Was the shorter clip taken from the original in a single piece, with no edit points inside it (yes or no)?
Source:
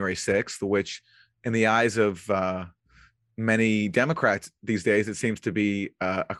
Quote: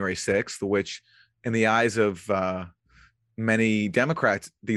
yes